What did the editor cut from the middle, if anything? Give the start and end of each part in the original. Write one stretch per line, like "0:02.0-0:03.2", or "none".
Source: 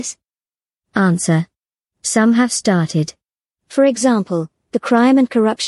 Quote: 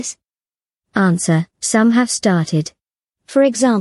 0:01.5-0:01.9

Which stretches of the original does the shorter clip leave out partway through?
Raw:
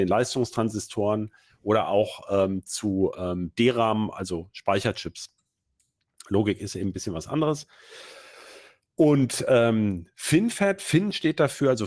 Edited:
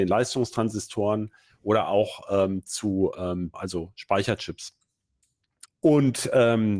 0:03.5-0:04.1
0:06.2-0:08.8

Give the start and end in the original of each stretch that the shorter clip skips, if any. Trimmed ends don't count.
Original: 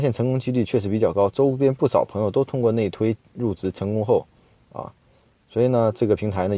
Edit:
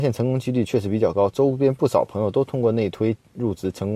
none

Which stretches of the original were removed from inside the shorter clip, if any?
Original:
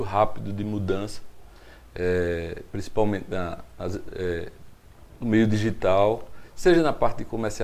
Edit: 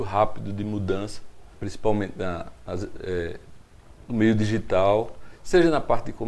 0:01.5-0:02.7

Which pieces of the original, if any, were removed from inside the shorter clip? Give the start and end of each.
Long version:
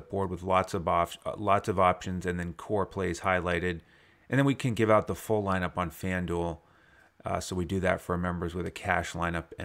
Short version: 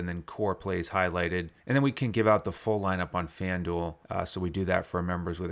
0:03.9-0:04.2
0:06.7-0:07.2

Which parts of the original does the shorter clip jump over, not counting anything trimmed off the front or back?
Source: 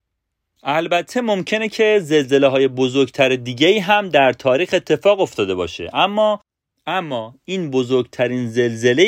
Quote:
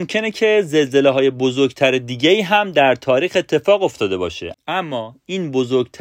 0:05.9-0:06.7

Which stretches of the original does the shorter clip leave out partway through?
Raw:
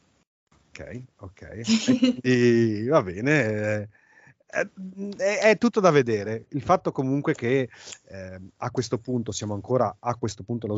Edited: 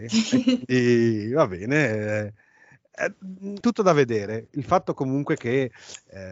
0:05.2-0:05.6

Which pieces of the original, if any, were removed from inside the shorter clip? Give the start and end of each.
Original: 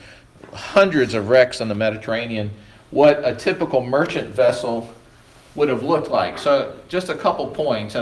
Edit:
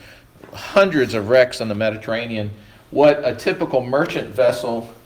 none

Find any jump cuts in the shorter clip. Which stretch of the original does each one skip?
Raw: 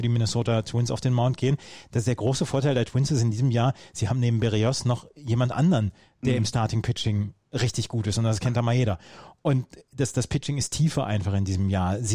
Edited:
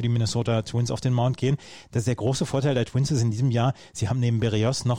none

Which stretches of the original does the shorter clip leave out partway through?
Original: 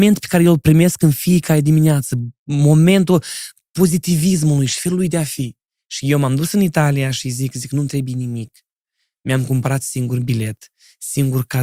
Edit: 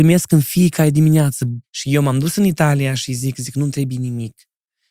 0:02.3-0:05.8

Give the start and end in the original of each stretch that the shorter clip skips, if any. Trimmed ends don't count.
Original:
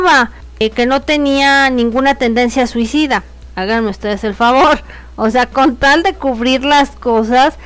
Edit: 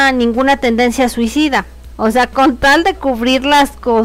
0:03.5-0:05.1

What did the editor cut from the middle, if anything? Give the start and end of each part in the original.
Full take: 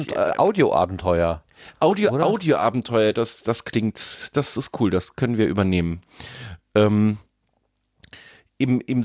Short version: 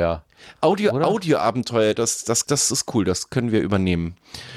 0:03.6-0:04.3

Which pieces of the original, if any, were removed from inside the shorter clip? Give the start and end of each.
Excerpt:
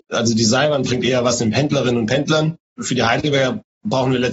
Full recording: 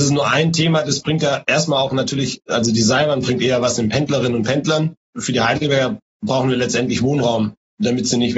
none

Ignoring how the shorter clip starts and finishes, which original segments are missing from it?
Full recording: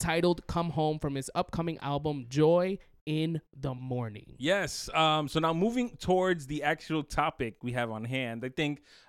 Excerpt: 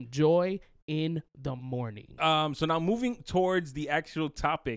0:04.4-0:04.9

